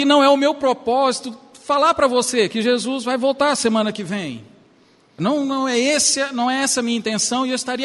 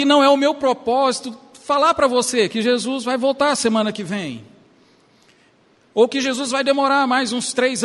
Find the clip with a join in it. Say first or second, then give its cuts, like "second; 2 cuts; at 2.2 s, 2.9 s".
first; 1 cut; at 5.2 s